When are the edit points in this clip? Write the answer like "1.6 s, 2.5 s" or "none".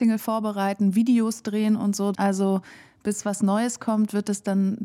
2.1 s